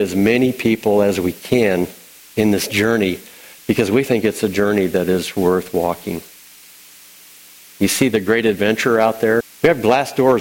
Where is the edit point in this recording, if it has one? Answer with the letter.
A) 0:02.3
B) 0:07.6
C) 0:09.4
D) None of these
C